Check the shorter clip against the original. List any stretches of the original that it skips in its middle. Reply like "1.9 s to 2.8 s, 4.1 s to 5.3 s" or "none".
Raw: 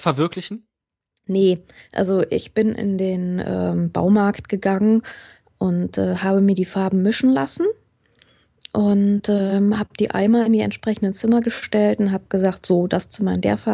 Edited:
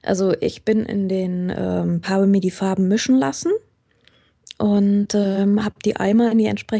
3.9 s to 6.2 s